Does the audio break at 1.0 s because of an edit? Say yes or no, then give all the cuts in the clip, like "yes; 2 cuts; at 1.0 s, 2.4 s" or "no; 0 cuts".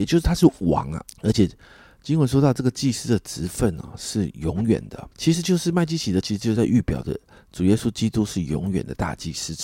yes; 2 cuts; at 1.0 s, 5.1 s